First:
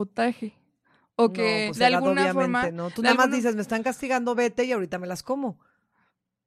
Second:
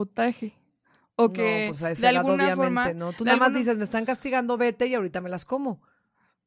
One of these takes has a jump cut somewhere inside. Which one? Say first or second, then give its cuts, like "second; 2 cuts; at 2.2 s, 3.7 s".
first; 1 cut; at 1.7 s